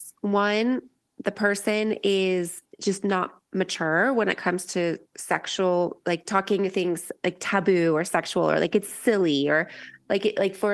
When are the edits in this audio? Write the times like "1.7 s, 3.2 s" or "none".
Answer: none